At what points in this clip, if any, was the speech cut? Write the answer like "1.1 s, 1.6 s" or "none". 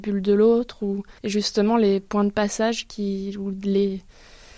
1.2 s